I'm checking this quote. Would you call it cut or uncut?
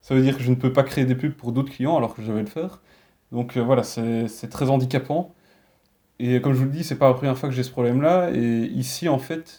uncut